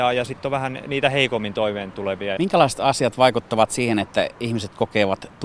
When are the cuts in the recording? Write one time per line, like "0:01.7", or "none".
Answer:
0:02.4